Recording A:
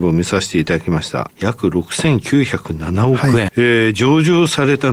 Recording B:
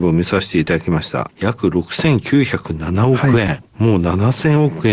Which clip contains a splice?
A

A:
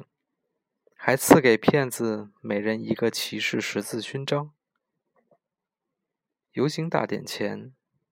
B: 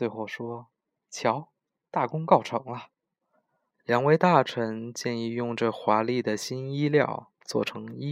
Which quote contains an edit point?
B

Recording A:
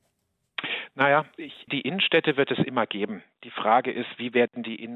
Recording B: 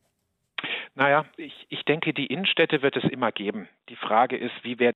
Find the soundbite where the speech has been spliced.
A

